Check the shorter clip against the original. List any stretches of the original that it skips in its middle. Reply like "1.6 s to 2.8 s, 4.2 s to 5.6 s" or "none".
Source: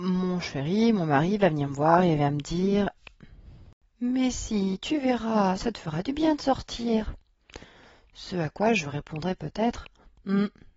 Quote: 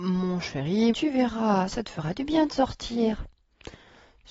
0.9 s to 4.8 s